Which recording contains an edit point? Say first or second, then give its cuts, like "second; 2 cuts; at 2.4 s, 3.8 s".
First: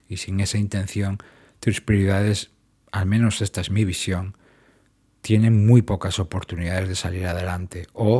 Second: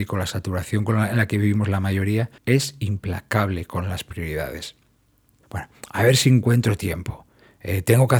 second; 2 cuts; at 2.4 s, 5.4 s